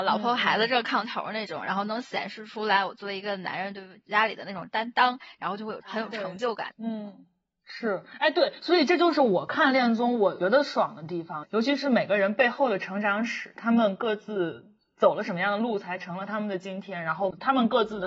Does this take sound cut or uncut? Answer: cut